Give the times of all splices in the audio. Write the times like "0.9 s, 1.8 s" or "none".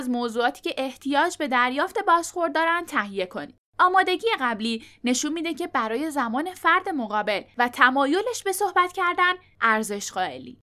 3.6 s